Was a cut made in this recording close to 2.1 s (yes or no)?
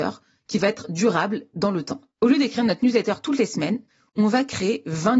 yes